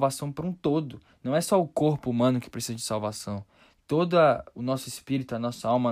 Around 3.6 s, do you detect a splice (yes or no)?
no